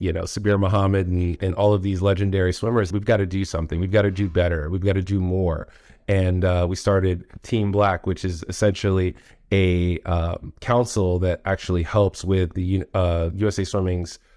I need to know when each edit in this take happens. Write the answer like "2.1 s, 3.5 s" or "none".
2.9 s